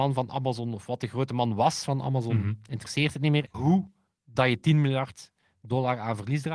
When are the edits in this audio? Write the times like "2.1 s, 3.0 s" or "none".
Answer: 3.5 s